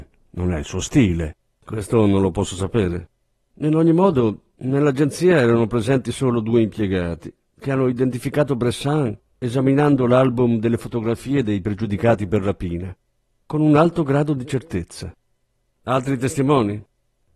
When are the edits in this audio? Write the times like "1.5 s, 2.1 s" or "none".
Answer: 1.6 s